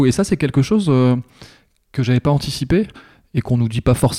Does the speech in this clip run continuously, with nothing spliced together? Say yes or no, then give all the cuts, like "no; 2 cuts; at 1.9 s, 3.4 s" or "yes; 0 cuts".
yes; 0 cuts